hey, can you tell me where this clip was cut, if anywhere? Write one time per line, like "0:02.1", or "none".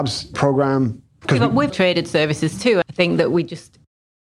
0:01.7
0:02.8